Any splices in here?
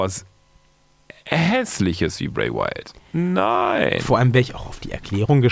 no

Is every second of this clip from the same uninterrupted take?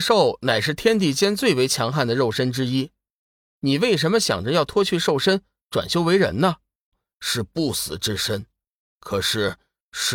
no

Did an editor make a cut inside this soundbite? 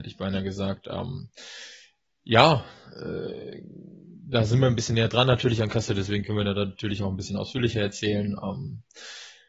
no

